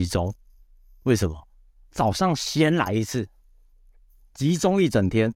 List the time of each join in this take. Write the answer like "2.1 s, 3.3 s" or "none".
none